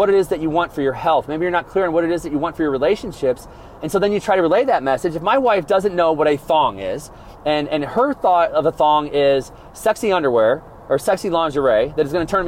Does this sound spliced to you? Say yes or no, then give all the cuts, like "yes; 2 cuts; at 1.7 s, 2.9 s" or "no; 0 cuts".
no; 0 cuts